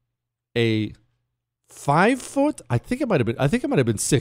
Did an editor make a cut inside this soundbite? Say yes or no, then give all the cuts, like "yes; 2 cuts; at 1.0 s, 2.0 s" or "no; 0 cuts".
no; 0 cuts